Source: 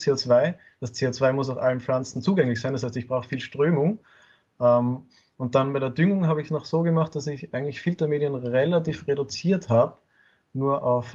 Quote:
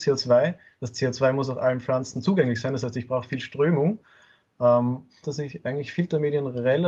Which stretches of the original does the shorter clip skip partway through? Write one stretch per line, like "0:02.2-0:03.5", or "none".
0:05.2-0:07.1